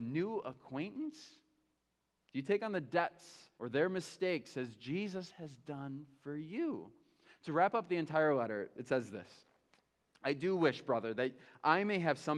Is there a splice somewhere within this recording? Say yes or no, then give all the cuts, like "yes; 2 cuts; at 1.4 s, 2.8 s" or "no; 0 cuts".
yes; 1 cut; at 3.6 s